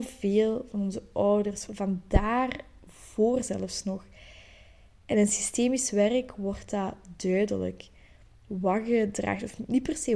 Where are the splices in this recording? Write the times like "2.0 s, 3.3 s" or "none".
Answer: 1.7 s